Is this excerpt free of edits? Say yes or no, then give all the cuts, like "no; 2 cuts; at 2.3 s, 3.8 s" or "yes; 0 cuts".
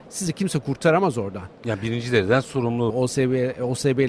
no; 1 cut; at 2.9 s